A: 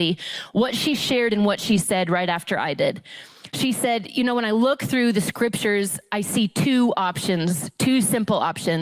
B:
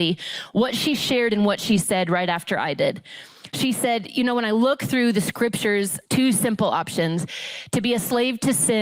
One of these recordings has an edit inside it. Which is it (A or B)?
B